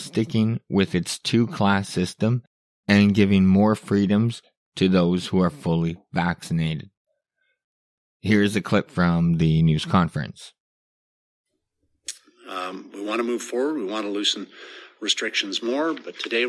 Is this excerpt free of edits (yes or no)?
yes